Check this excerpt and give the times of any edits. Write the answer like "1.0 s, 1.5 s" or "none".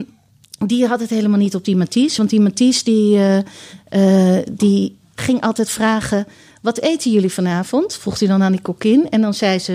none